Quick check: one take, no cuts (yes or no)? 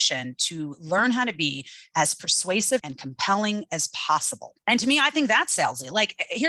no